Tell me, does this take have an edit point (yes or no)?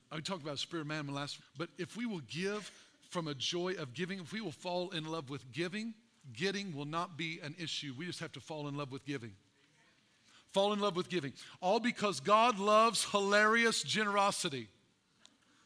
yes